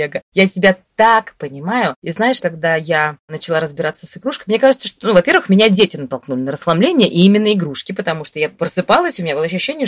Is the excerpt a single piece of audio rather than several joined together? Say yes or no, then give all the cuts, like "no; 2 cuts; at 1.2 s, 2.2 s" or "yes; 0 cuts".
no; 1 cut; at 2.4 s